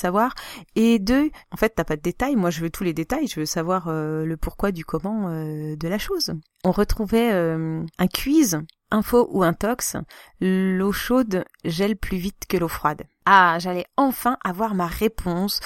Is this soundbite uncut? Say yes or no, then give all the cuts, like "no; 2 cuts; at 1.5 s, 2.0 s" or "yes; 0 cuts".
yes; 0 cuts